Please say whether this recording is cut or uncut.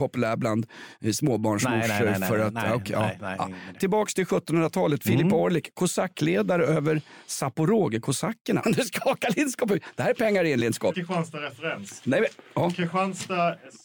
cut